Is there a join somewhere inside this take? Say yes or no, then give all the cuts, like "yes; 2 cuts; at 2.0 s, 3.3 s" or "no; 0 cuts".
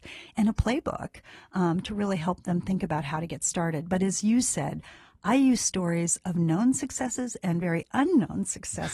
no; 0 cuts